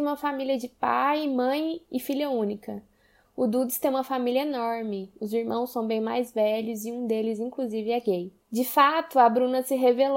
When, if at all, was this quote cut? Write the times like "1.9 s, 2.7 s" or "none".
none

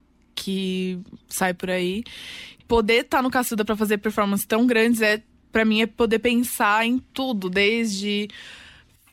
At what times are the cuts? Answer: 2.6 s

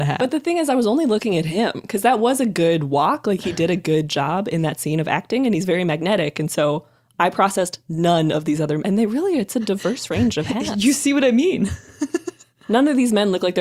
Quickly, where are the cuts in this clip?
none

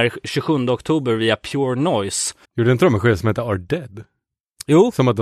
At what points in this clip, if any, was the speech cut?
2.4 s

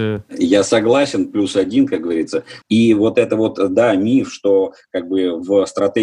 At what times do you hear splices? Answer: 2.6 s

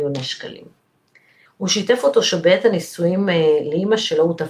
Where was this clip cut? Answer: 1.5 s

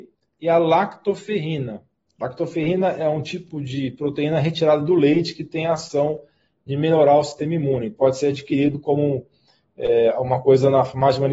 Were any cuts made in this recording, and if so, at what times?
none

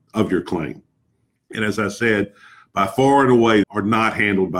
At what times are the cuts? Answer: 1.4 s, 3.6 s

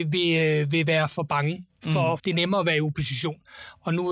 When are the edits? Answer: 2.2 s

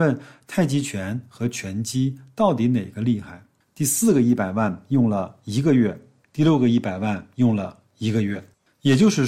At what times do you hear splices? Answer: 3.7 s, 6.2 s

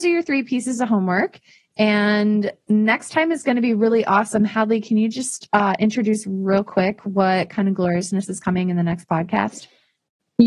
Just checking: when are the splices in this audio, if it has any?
none

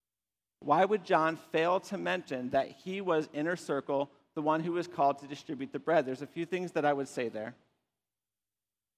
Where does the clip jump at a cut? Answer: none

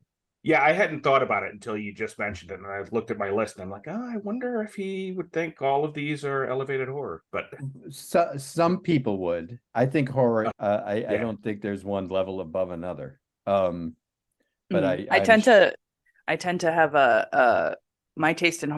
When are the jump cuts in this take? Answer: 10.5 s

